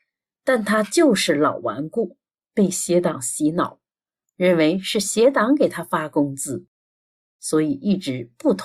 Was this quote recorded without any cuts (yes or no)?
yes